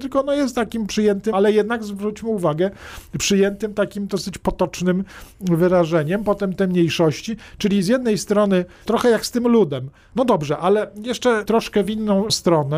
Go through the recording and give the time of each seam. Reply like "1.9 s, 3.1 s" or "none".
1.3 s, 10.1 s